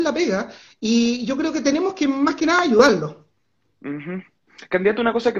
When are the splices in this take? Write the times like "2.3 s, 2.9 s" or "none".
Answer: none